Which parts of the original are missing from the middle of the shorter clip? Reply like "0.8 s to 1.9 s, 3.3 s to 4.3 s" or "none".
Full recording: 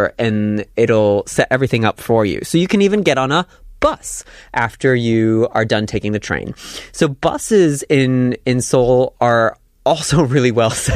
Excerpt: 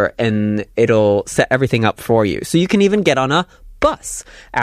none